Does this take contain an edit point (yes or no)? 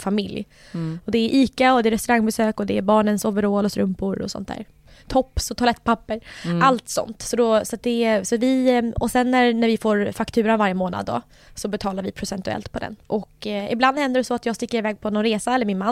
no